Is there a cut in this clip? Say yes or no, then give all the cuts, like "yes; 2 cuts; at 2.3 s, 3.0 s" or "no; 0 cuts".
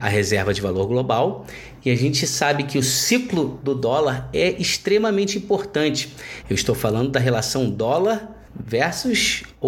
yes; 2 cuts; at 6.4 s, 8.5 s